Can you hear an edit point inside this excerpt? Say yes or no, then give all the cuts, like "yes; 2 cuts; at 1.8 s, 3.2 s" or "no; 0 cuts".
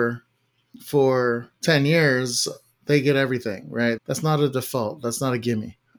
no; 0 cuts